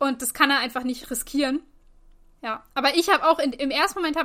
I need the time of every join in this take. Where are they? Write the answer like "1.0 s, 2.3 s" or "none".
2.4 s

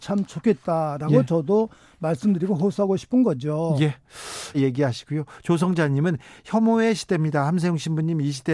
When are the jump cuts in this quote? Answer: 4.5 s

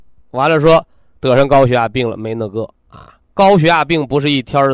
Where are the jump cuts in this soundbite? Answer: 3.2 s

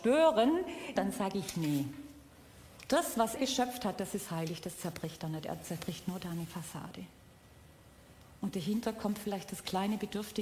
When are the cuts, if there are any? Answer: 1.0 s, 3.4 s

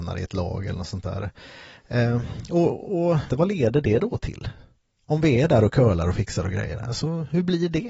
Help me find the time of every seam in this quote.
3.3 s

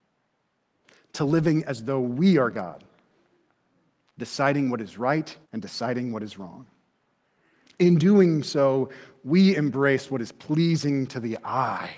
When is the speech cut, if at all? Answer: 5.4 s

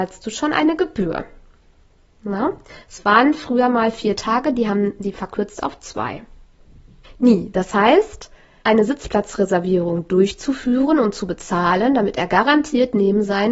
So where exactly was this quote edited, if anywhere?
7.0 s, 8.6 s

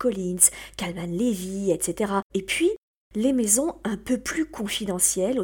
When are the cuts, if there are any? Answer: 2.3 s

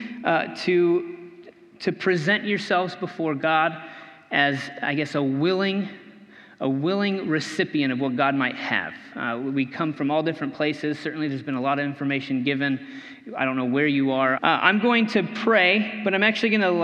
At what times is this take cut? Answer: 14.4 s

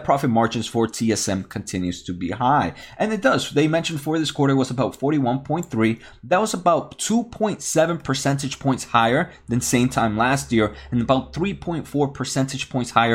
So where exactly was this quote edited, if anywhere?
none

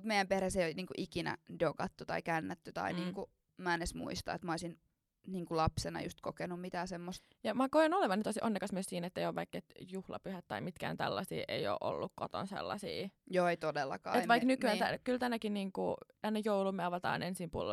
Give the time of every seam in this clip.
none

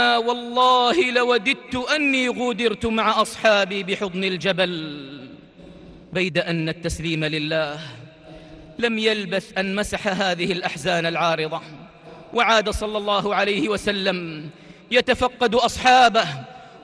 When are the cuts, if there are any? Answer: 6.0 s

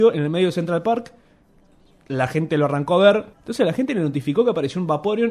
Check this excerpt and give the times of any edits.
3.3 s

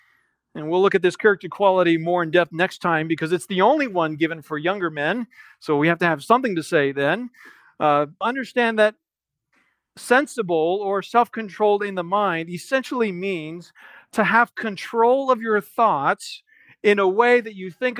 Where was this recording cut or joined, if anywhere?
8.2 s

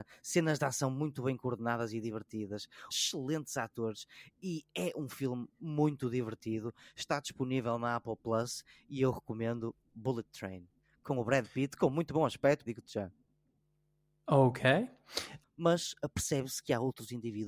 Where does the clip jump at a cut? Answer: 2.9 s, 12.7 s, 15.4 s

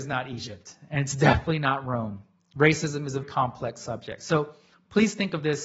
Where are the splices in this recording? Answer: 3.2 s

